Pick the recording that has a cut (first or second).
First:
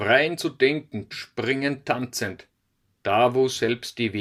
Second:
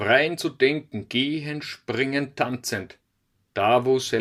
first